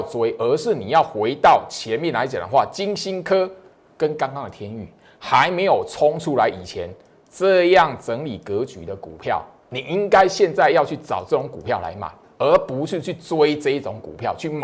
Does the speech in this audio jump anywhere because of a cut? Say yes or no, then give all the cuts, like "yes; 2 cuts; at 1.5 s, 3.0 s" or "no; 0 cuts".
no; 0 cuts